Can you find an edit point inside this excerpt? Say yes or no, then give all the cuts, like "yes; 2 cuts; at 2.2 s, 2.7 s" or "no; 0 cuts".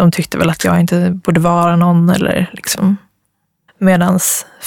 yes; 1 cut; at 3.7 s